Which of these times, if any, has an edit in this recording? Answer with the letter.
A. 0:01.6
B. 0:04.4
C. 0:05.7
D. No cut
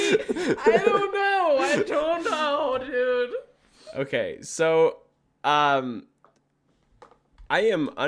D